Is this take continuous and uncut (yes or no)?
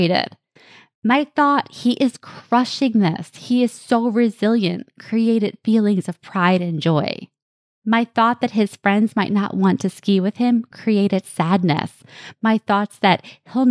yes